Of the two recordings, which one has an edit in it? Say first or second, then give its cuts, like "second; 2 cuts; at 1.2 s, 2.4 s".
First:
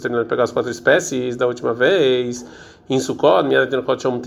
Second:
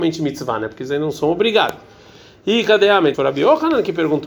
second; 1 cut; at 3.1 s